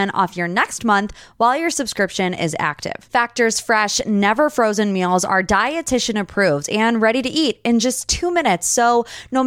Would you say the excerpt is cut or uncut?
uncut